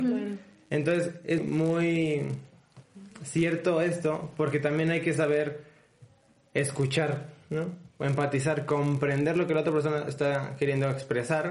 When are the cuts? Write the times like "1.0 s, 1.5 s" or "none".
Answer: 1.4 s

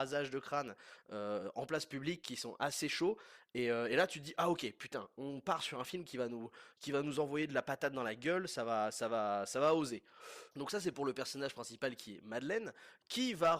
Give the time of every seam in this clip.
10.5 s

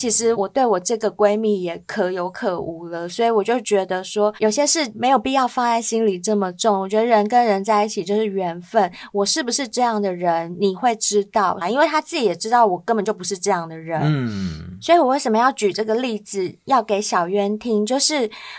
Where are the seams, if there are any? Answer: 11.6 s

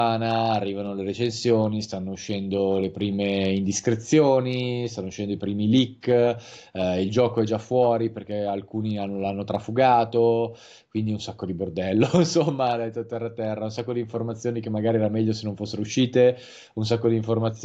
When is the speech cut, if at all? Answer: none

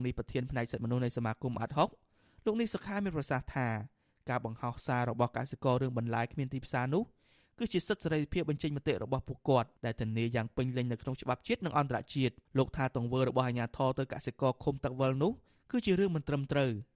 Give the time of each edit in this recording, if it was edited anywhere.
9.8 s, 12.5 s

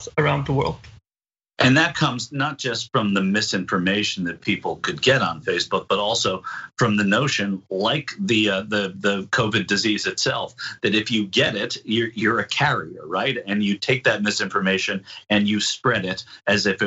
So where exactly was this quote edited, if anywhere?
none

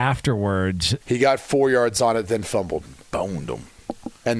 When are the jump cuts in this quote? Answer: 1.0 s

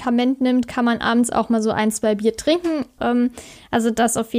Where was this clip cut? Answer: 3.0 s

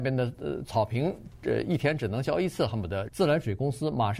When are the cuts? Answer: 3.1 s

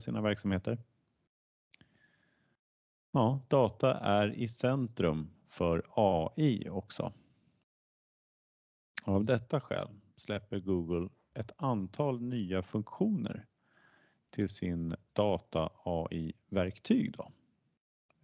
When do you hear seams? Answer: none

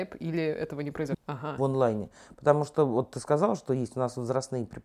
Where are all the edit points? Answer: 1.1 s

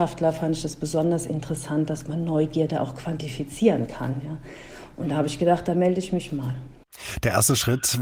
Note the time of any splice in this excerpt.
none

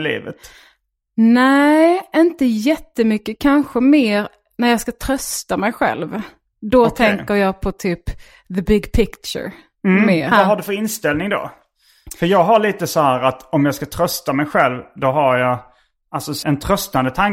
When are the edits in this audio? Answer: 10.3 s, 16.4 s

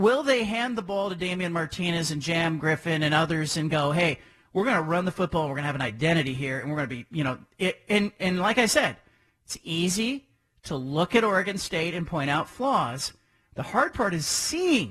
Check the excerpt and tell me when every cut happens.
none

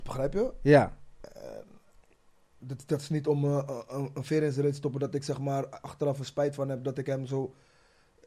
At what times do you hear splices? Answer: none

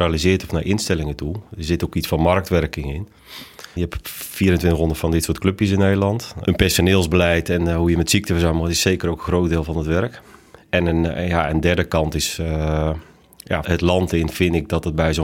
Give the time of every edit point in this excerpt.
3.8 s, 6.4 s, 13.6 s

